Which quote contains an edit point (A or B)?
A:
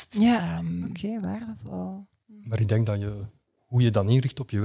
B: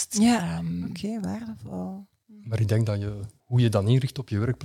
B